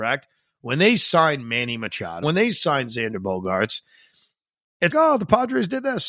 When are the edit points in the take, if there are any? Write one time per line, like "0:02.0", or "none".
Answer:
0:02.2
0:04.9